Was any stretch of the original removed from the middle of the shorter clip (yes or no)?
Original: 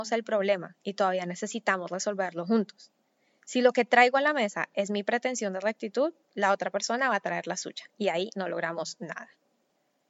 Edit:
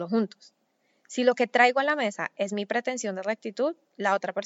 no